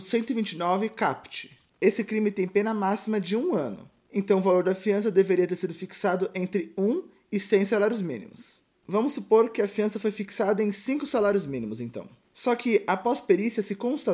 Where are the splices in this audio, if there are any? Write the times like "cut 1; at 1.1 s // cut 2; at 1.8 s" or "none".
none

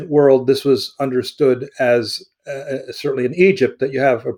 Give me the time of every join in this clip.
none

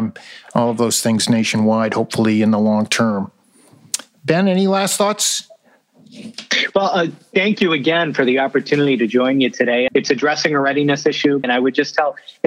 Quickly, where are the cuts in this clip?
cut 1; at 9.9 s // cut 2; at 11.4 s

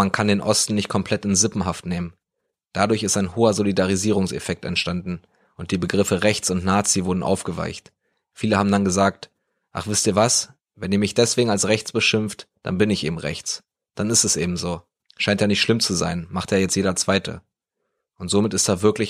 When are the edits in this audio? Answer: none

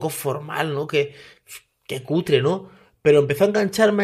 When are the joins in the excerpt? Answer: none

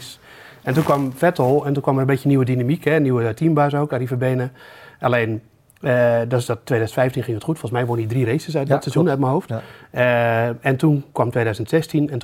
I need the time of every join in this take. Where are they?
none

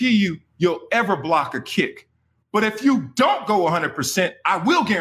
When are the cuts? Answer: none

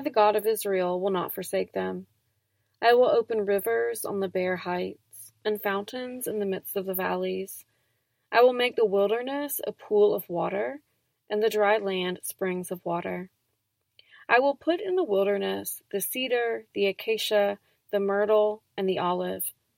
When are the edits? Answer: none

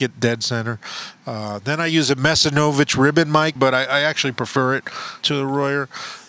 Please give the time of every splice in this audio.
cut 1; at 3.6 s // cut 2; at 5.2 s

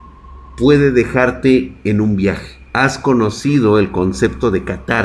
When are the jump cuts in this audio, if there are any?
cut 1; at 2.7 s

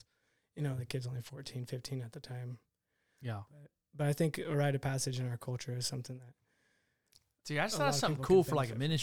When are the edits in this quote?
none

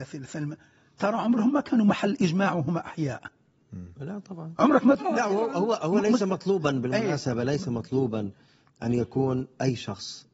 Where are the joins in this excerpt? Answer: none

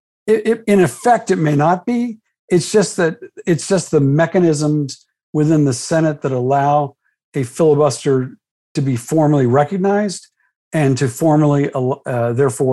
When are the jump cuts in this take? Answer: none

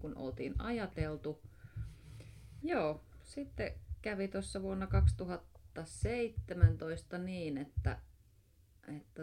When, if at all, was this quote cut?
cut 1; at 2.6 s

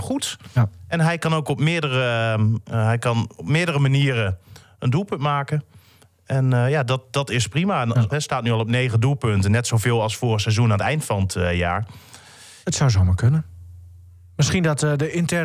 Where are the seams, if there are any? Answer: cut 1; at 2.6 s // cut 2; at 8.1 s // cut 3; at 12.6 s

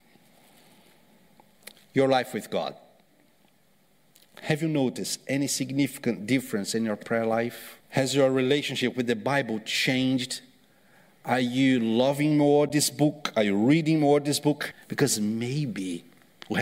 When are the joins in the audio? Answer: cut 1; at 7.8 s // cut 2; at 14.7 s

